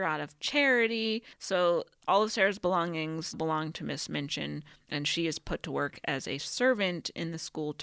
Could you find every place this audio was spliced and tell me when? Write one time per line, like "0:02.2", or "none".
0:01.3
0:03.3